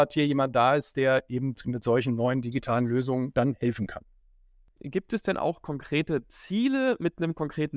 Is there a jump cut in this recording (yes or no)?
yes